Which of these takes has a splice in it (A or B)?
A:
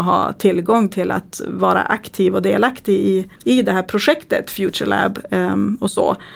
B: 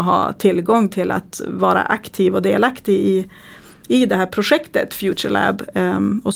A